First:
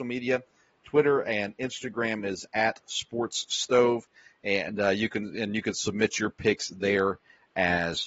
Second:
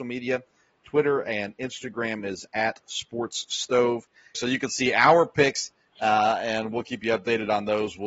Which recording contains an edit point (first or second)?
second